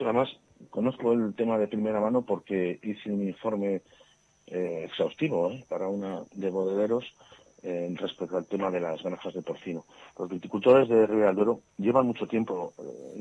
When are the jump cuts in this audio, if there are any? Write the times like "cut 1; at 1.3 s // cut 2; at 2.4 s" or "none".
cut 1; at 6.3 s